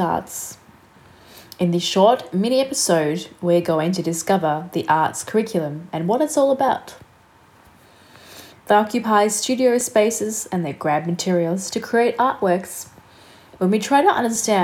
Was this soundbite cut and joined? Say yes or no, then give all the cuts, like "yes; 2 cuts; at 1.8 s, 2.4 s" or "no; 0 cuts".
yes; 1 cut; at 8.5 s